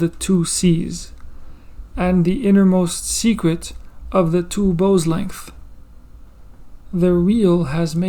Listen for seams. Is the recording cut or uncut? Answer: uncut